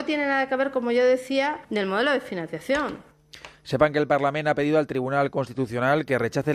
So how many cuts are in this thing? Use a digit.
0